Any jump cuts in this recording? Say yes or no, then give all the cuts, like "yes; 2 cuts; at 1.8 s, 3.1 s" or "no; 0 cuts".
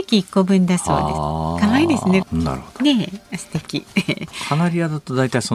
yes; 1 cut; at 2.2 s